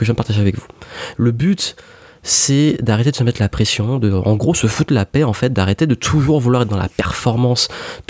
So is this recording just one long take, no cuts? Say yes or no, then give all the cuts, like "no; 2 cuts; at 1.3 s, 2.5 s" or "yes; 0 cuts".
no; 1 cut; at 1.1 s